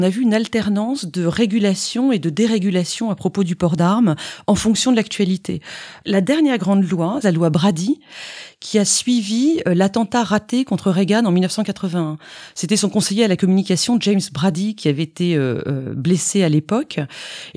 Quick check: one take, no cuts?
no; 2 cuts; at 6.0 s, 7.2 s

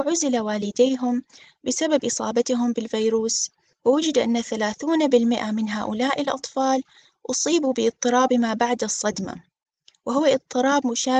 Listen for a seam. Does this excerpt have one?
no; 0 cuts

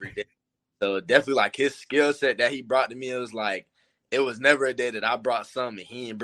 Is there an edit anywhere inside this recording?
no; 0 cuts

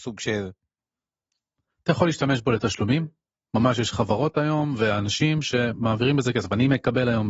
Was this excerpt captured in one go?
yes; 0 cuts

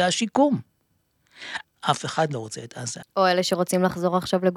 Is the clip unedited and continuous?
no; 2 cuts; at 1.6 s, 3.0 s

